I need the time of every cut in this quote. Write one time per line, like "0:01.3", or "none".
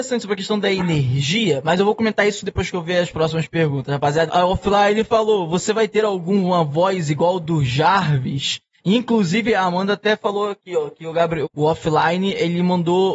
0:04.3
0:11.4